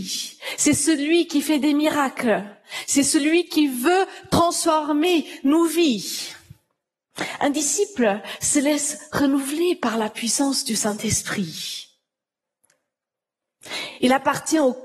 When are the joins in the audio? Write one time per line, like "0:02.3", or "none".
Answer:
none